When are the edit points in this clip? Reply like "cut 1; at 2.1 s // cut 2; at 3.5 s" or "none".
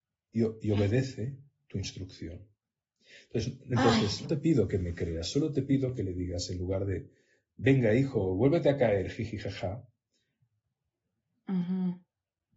cut 1; at 4.2 s // cut 2; at 11.5 s